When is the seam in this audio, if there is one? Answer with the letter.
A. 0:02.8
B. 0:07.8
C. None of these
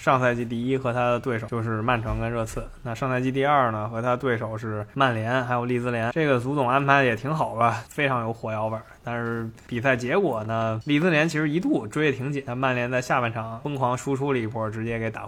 B